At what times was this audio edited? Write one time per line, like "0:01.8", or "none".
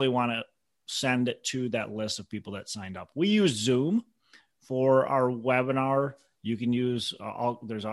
none